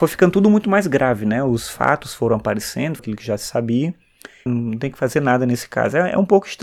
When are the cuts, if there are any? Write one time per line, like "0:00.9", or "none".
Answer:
0:03.0
0:04.5